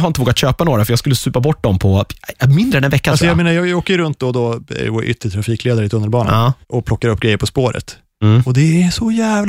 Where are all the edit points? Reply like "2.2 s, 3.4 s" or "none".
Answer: 6.6 s

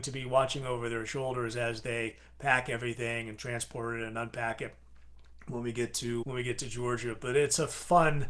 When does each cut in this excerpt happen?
6.2 s

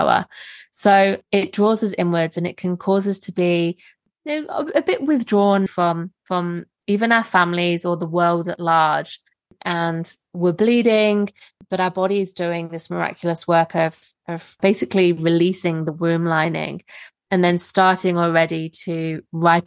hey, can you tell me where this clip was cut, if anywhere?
5.7 s

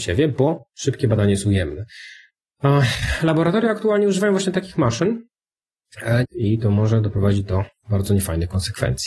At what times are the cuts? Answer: 6.2 s

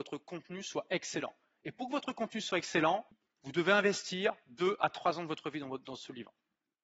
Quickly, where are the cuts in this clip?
none

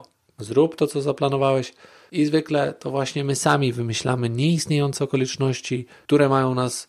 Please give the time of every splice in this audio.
none

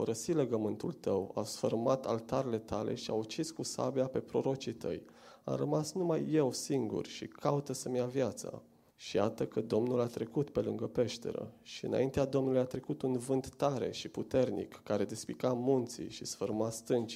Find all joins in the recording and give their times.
8.9 s

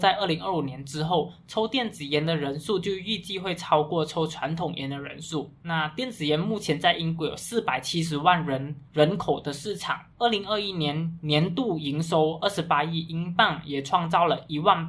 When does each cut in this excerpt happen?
none

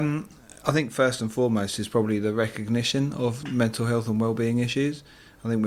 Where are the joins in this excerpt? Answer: 3.4 s

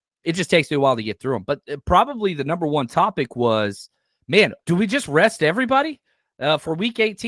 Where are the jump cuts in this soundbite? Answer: 4.6 s

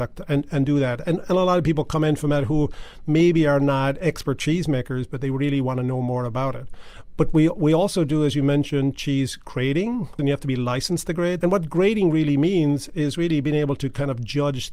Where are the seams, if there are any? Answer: 10.2 s, 11.4 s

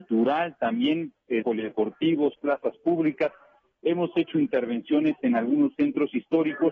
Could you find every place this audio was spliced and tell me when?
1.4 s

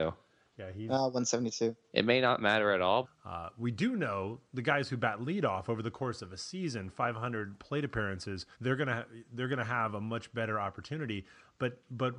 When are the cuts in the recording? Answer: 1.9 s, 3.0 s, 8.5 s

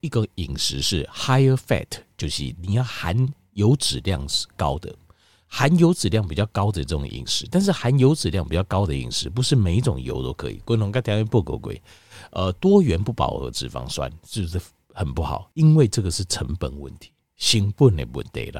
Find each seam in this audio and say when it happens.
15.5 s

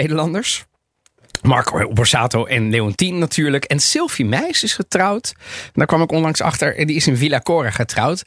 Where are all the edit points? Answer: none

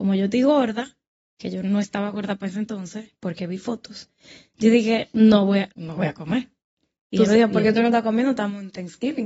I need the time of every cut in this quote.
5.7 s

